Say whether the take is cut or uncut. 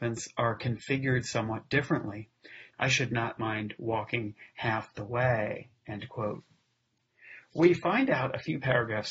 cut